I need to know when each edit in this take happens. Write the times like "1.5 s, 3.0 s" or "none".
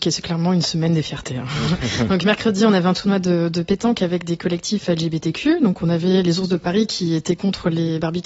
none